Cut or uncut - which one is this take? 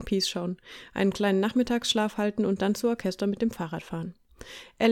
uncut